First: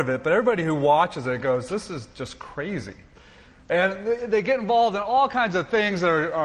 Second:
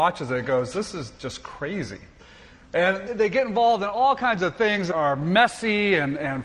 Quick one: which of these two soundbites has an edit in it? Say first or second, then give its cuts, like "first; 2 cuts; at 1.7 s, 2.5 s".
second; 2 cuts; at 3.1 s, 4.9 s